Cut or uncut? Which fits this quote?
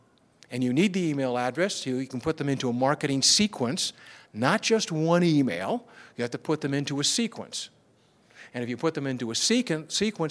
uncut